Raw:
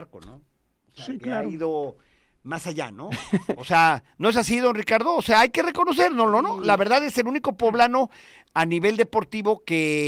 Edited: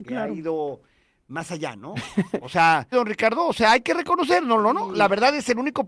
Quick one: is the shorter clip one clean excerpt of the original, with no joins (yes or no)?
no